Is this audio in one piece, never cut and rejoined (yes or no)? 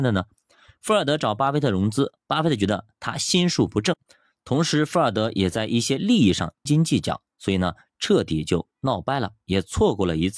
no